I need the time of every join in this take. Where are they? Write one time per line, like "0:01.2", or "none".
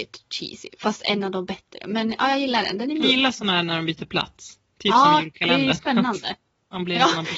0:03.0